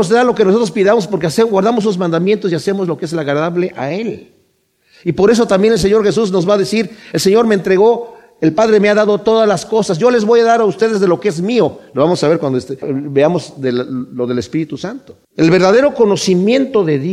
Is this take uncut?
no; 2 cuts; at 12.8 s, 15.2 s

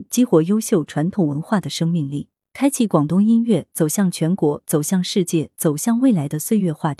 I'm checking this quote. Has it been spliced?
yes; 1 cut; at 2.5 s

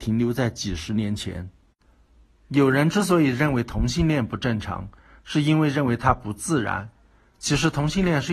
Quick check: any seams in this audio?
no; 0 cuts

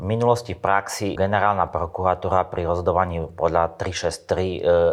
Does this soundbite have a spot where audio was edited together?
yes; 1 cut; at 1.2 s

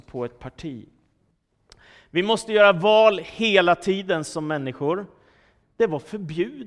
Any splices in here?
yes; 1 cut; at 5.6 s

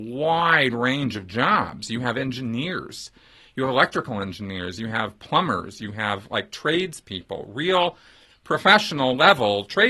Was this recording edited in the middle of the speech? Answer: no; 0 cuts

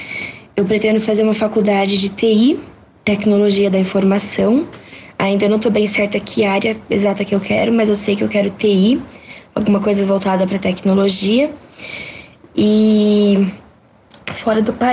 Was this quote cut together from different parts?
no; 0 cuts

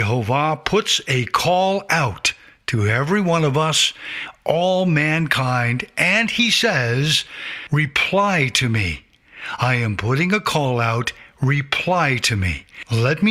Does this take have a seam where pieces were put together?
no; 0 cuts

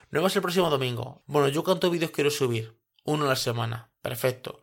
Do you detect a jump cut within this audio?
yes; 1 cut; at 1.2 s

